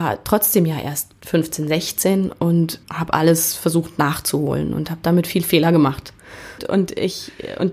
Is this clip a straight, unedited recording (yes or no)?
no